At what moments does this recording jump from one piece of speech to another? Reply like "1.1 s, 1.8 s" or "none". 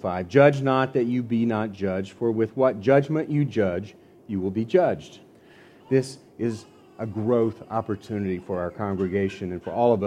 5.8 s